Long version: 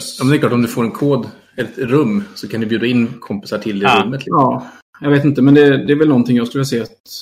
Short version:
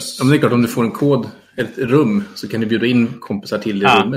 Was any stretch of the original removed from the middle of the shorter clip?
no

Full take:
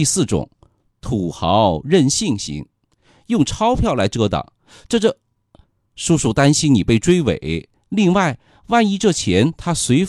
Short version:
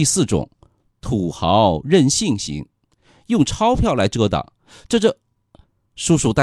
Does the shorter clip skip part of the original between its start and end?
no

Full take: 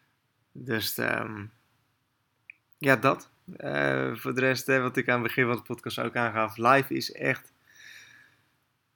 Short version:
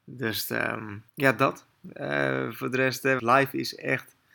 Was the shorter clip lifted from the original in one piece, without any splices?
no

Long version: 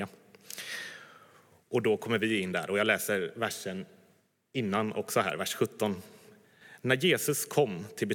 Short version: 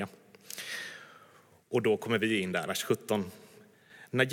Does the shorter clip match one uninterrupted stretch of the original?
no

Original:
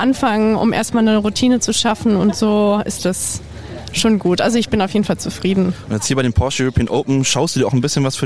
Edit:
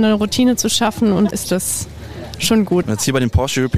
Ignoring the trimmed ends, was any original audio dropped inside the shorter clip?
yes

